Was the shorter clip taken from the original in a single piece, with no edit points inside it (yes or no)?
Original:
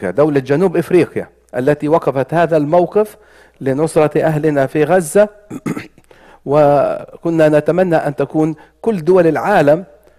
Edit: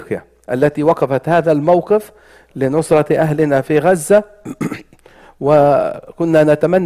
yes